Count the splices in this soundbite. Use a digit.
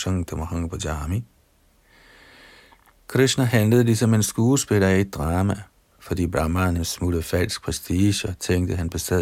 1